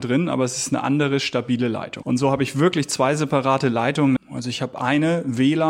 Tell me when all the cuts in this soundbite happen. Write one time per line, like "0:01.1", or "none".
0:02.0
0:04.2

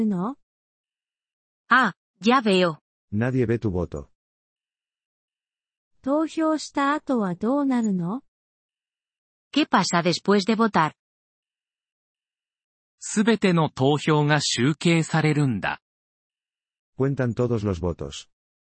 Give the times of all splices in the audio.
0:03.0

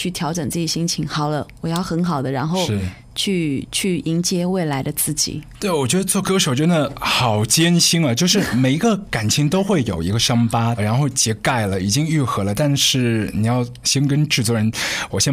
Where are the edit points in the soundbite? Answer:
0:10.8
0:13.8

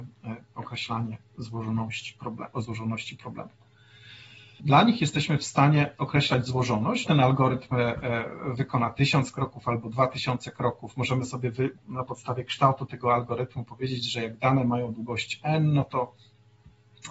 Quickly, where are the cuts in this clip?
0:04.6
0:07.1
0:11.8

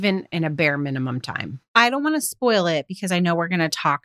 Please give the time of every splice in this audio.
0:01.7

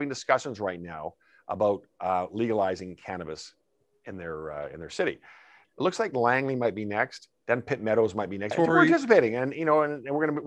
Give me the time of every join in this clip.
0:05.6
0:08.5

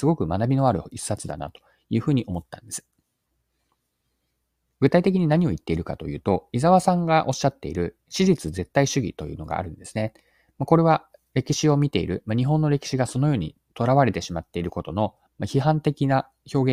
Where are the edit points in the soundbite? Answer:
none

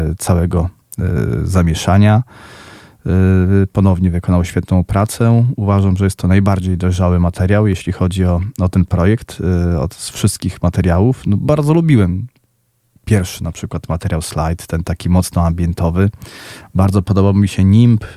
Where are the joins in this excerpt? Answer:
none

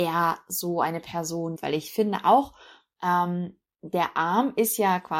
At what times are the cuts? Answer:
0:01.6

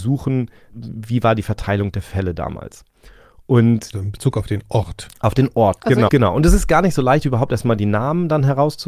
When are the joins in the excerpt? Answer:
0:03.9
0:06.1

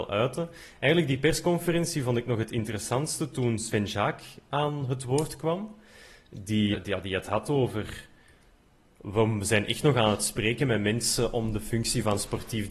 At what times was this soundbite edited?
0:06.7

